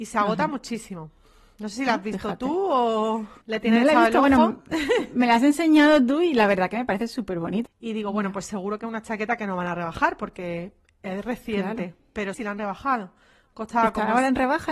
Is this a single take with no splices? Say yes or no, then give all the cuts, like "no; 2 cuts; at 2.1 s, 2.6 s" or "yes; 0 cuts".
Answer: no; 3 cuts; at 3.4 s, 7.7 s, 12.3 s